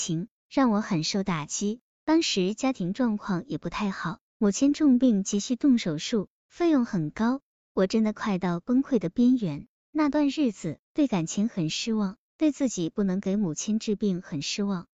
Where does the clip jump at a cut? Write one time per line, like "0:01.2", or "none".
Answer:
0:10.8